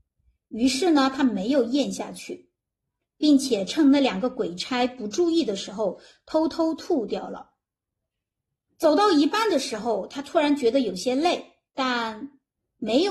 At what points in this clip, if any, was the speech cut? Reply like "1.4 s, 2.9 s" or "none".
8.7 s, 11.7 s